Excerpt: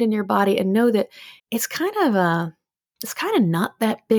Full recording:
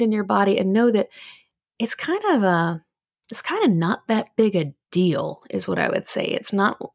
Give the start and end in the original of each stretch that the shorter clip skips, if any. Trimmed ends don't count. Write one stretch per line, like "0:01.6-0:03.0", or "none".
0:01.4-0:01.7

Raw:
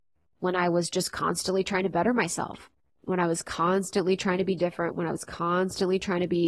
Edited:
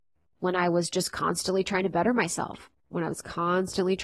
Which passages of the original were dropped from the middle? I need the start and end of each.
0:02.9-0:04.9

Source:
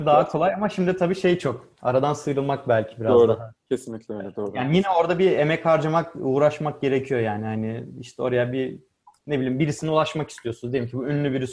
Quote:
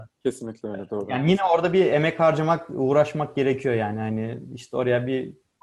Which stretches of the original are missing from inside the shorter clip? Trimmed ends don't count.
none

